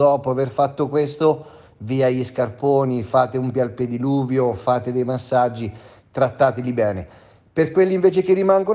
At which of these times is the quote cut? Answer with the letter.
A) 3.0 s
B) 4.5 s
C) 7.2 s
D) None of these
D